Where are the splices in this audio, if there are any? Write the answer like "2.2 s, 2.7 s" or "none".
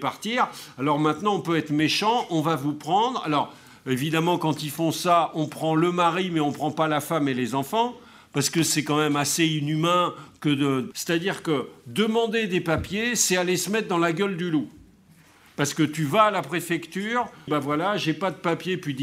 10.9 s, 17.5 s